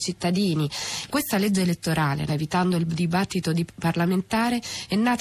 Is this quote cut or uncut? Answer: cut